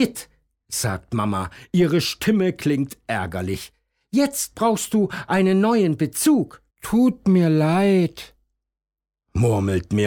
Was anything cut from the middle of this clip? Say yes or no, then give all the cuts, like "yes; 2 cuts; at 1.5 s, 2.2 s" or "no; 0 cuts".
yes; 1 cut; at 6.7 s